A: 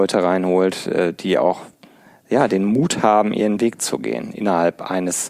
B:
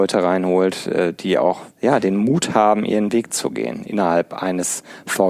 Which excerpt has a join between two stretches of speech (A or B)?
B